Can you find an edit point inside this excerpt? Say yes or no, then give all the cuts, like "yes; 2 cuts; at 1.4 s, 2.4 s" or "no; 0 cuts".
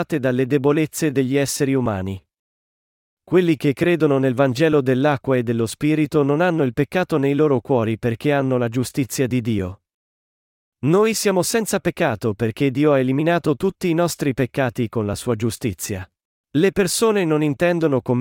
yes; 1 cut; at 16.4 s